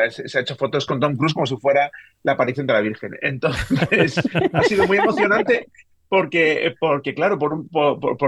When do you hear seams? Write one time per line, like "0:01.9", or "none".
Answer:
none